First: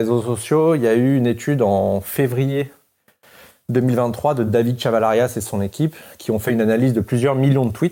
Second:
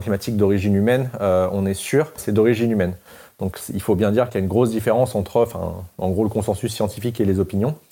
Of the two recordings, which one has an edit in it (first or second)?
second